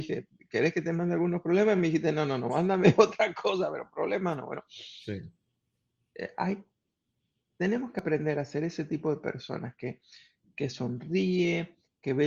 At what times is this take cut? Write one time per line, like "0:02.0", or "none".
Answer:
none